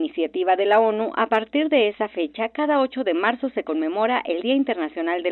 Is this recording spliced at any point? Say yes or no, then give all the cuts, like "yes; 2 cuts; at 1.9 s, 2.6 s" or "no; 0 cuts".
no; 0 cuts